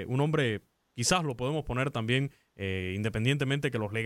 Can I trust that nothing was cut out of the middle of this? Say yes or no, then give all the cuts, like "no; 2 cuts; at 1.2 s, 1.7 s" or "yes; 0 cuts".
yes; 0 cuts